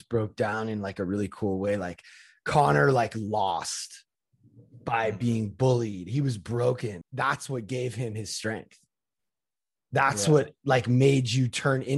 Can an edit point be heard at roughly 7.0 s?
yes; 1 cut; at 7.0 s

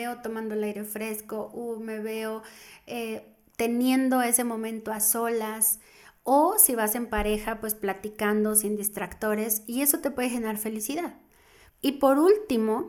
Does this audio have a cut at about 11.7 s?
yes; 1 cut; at 11.7 s

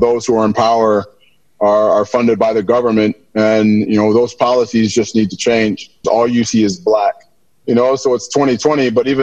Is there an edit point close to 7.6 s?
yes; 2 cuts; at 6.0 s, 7.6 s

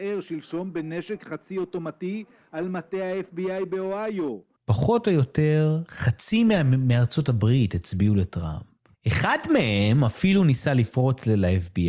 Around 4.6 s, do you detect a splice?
yes; 2 cuts; at 4.6 s, 8.9 s

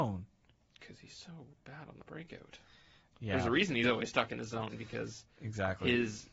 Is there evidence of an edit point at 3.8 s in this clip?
no; 0 cuts

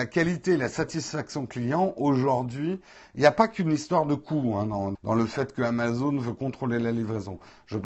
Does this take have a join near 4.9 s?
yes; 1 cut; at 4.9 s

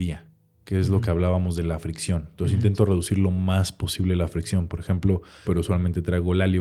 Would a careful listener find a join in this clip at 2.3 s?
no; 1 cut; at 5.4 s

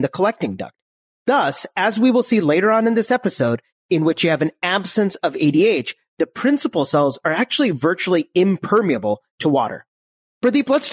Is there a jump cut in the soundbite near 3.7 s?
yes; 1 cut; at 3.7 s

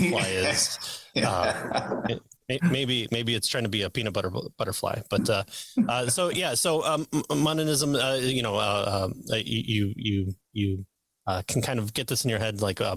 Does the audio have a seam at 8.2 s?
no; 0 cuts

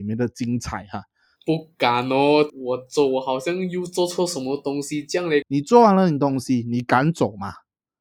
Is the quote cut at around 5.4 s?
yes; 3 cuts; at 1.4 s, 2.5 s, 5.4 s

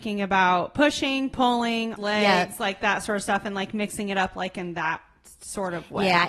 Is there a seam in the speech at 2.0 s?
yes; 1 cut; at 2.0 s

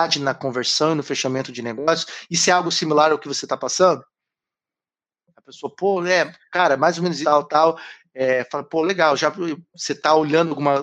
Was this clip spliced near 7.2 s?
yes; 1 cut; at 7.2 s

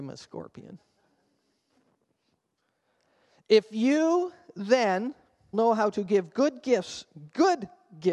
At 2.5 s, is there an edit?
no; 1 cut; at 5.5 s

